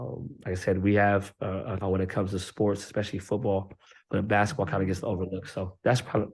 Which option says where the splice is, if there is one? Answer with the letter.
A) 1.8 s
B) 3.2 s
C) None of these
A